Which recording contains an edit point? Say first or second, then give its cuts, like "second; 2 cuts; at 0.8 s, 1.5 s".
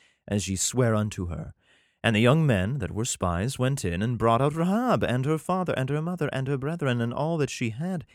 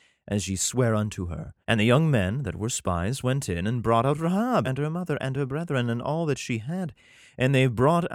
second; 2 cuts; at 1.6 s, 4.6 s